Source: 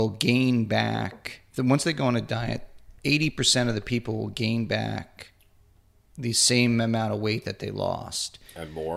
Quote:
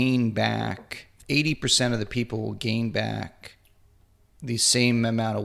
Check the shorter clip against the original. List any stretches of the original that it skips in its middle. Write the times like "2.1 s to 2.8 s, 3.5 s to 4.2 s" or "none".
1.6 s to 3.0 s